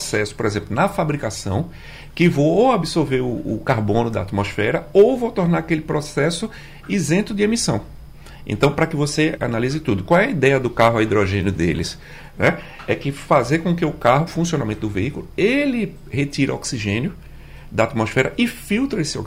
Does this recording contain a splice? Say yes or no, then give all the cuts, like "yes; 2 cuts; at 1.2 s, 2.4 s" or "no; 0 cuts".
yes; 2 cuts; at 9.4 s, 14.3 s